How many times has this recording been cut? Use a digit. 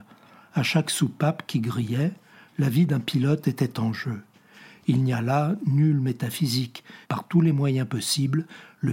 1